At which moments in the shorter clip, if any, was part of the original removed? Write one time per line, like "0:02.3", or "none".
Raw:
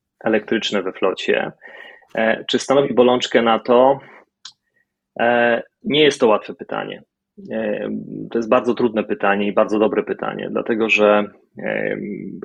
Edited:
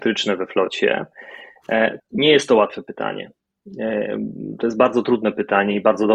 0:02.0